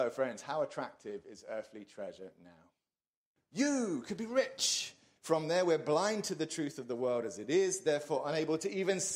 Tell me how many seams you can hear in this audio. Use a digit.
2